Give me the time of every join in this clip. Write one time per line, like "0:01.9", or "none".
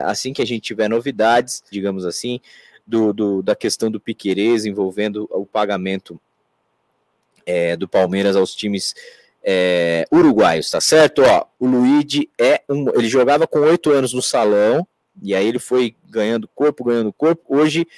0:01.7
0:11.5